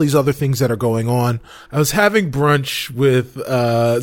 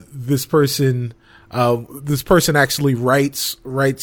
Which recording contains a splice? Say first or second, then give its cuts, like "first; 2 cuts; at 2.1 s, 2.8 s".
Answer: first; 1 cut; at 1.7 s